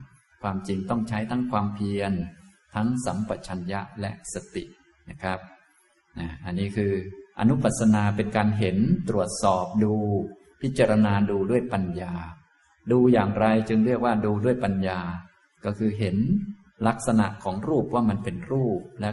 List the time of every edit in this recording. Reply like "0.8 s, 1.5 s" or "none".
none